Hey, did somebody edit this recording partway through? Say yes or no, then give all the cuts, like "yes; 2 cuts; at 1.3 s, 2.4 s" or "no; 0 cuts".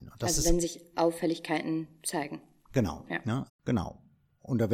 yes; 1 cut; at 3.5 s